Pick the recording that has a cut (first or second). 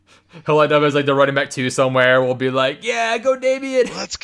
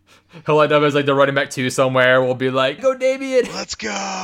second